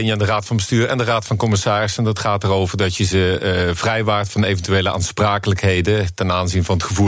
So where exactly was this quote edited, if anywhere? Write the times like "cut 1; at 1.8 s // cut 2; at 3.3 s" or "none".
none